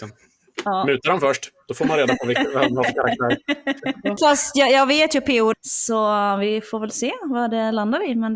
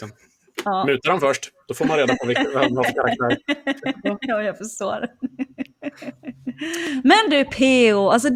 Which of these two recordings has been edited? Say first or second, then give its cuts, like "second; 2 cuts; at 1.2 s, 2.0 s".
first; 2 cuts; at 4.2 s, 5.5 s